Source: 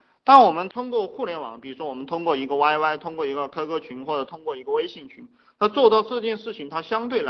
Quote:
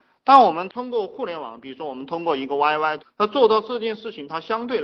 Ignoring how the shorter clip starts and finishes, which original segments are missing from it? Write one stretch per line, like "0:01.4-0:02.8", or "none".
0:03.0-0:05.4